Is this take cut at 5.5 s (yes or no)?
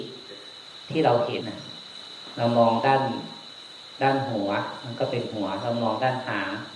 no